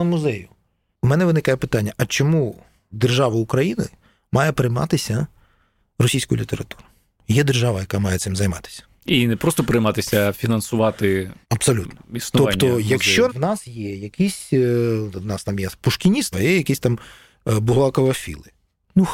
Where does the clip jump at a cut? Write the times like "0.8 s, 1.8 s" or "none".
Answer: 11.4 s, 13.3 s, 16.3 s